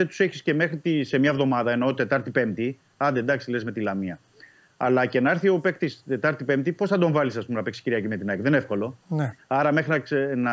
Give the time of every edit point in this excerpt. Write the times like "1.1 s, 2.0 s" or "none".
9.4 s